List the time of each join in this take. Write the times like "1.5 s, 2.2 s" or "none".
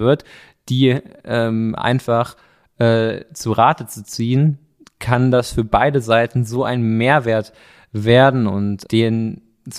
8.8 s